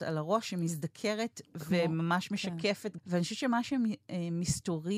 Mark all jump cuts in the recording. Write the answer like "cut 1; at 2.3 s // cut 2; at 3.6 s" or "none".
cut 1; at 3.0 s